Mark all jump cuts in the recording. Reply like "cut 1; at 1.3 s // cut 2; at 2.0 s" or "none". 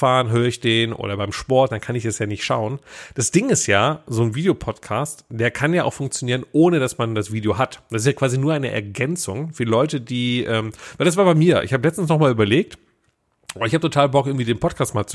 none